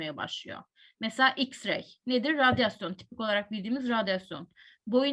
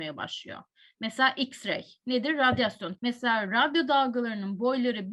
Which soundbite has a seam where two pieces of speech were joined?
second; 1 cut; at 2.9 s

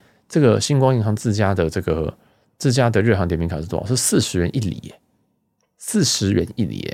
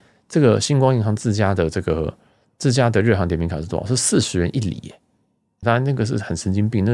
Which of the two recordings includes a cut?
second; 1 cut; at 5.6 s

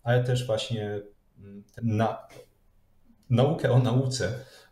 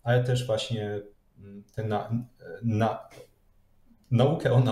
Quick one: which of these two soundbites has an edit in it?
first; 1 cut; at 1.8 s

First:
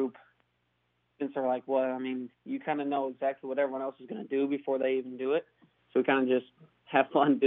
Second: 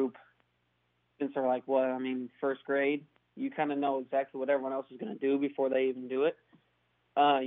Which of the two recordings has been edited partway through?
first; 2 cuts; at 2.3 s, 5.8 s

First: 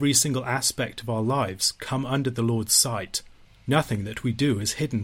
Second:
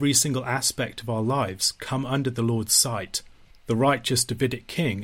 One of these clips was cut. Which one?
second; 1 cut; at 3.5 s

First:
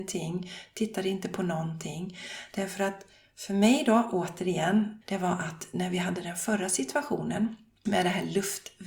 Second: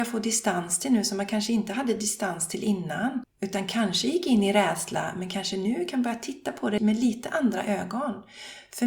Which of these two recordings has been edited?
first; 1 cut; at 5.0 s

